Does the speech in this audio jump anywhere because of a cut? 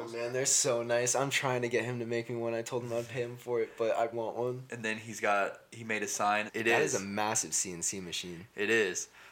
yes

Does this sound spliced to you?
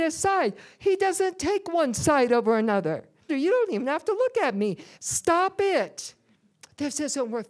yes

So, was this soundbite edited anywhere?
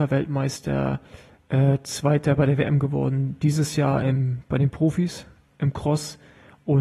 no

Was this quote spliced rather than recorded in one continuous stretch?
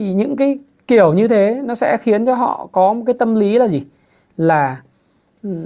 no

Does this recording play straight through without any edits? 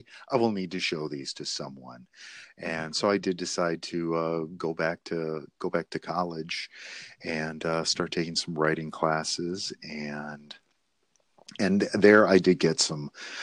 yes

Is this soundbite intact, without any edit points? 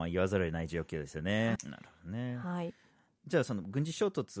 no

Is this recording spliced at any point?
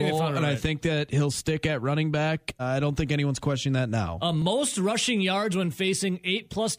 yes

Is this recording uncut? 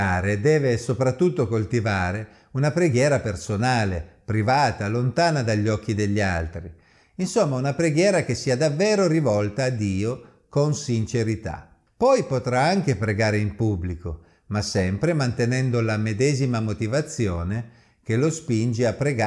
yes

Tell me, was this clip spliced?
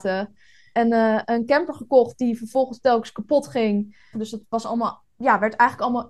yes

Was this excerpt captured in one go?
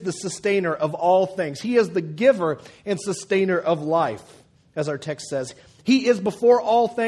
yes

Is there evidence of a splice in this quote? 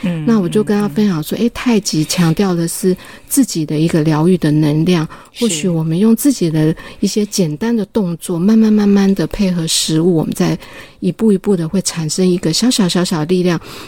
no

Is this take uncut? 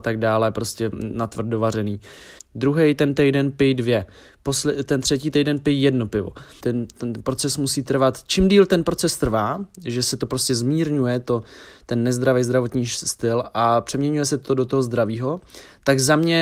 no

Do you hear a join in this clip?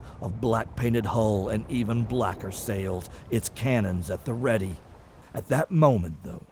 yes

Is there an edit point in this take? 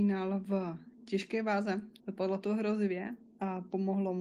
yes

